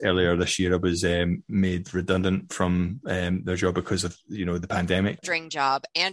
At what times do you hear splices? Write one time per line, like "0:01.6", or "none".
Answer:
0:05.2